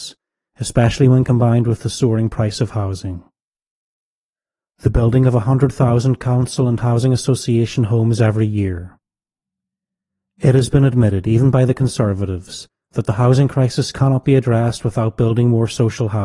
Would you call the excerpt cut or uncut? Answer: uncut